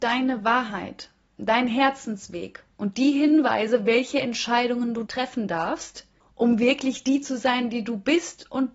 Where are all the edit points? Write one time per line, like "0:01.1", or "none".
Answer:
none